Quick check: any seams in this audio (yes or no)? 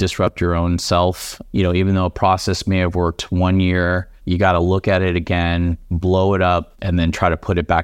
yes